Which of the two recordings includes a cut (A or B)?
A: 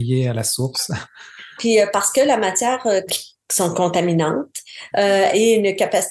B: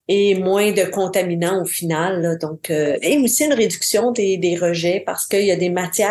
A